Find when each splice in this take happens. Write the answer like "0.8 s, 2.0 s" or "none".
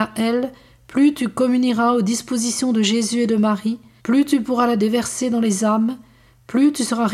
4.0 s